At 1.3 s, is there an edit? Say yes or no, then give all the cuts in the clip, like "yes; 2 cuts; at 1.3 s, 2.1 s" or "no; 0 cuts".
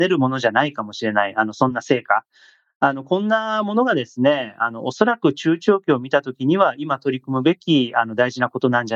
no; 0 cuts